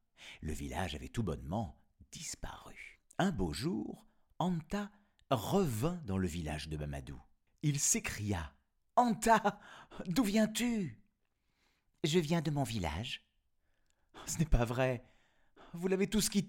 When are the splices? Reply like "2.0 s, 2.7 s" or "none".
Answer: 7.5 s